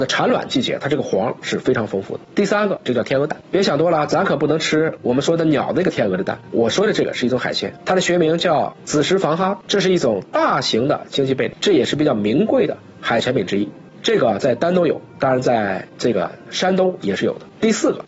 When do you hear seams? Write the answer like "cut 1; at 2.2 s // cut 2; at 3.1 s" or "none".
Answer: none